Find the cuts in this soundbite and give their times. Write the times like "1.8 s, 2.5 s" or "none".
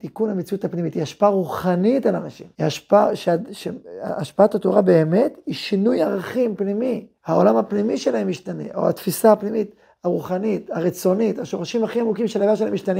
2.6 s, 7.2 s

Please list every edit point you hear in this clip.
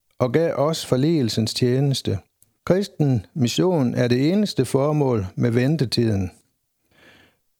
2.6 s

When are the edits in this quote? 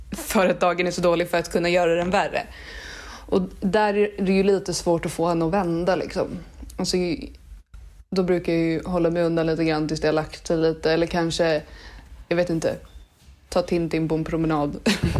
none

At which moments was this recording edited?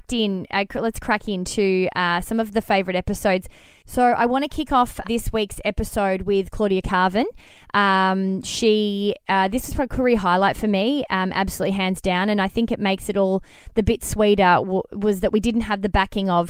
5.0 s

